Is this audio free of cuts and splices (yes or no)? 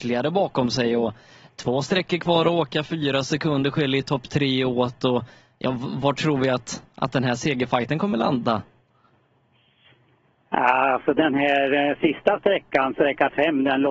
yes